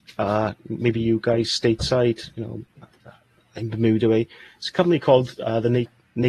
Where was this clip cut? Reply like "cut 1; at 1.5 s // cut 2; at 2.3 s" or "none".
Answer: none